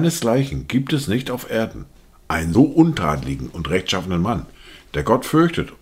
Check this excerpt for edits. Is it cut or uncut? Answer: cut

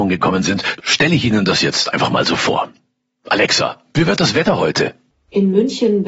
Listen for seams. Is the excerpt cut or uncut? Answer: uncut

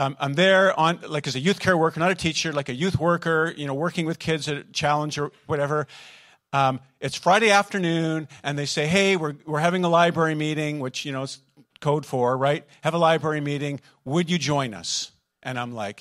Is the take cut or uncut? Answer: uncut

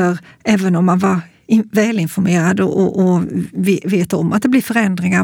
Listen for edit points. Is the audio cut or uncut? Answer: uncut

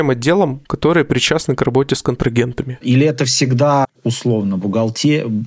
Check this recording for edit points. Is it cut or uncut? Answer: cut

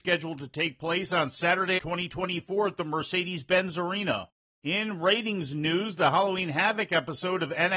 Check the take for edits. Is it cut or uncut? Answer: cut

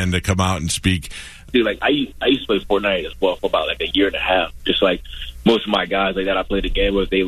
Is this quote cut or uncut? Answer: cut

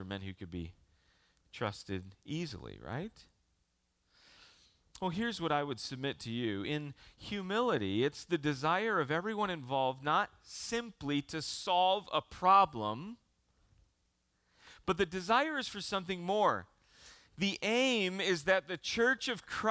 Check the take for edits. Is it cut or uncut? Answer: uncut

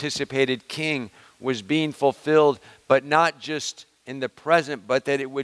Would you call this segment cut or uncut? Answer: uncut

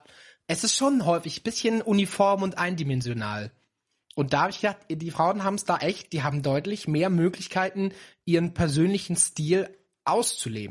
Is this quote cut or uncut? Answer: uncut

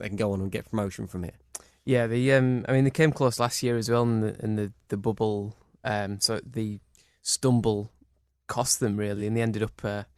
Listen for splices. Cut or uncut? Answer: uncut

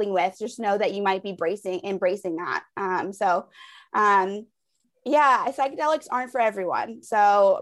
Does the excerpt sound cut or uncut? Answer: uncut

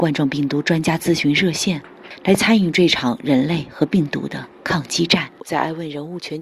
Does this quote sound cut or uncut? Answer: uncut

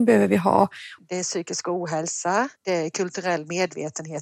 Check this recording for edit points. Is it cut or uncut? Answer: cut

